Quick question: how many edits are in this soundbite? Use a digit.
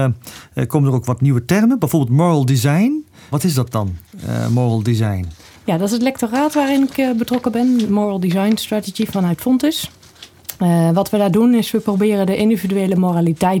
1